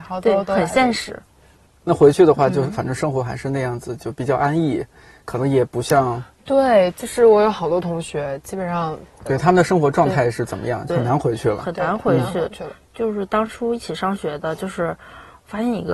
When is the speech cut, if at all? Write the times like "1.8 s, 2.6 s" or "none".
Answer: 9.3 s, 10.9 s